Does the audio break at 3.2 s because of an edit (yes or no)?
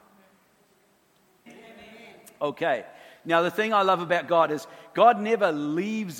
no